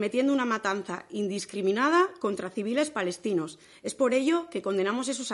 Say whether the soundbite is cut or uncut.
uncut